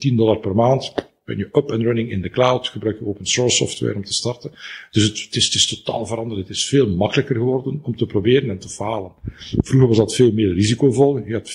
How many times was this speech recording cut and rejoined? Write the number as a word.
zero